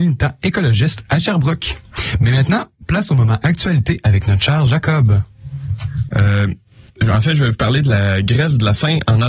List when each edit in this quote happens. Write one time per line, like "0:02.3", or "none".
0:06.1

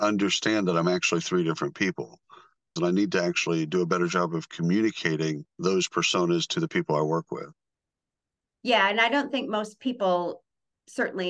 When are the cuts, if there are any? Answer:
0:02.8
0:05.5

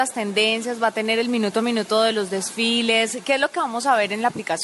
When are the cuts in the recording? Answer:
none

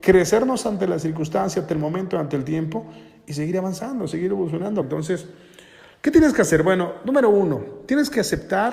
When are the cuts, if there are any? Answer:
0:04.8

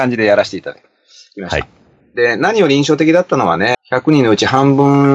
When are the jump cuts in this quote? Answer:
0:02.0
0:03.7

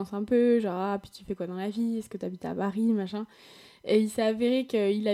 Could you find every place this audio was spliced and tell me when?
none

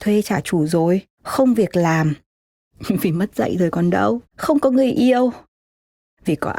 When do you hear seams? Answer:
0:01.1
0:04.3

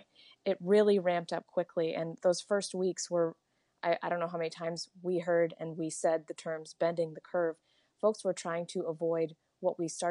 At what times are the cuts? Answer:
none

